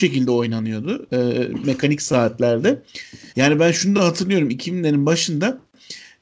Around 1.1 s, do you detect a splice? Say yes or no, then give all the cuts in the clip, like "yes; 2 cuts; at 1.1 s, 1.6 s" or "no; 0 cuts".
yes; 2 cuts; at 1.1 s, 3.3 s